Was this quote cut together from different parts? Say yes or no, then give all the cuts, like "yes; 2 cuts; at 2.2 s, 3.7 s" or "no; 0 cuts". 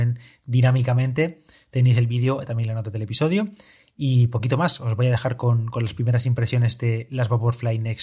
no; 0 cuts